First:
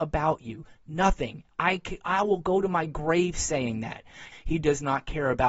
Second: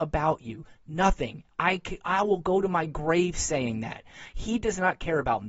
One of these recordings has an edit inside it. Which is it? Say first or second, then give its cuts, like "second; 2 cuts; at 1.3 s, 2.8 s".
first; 1 cut; at 4.3 s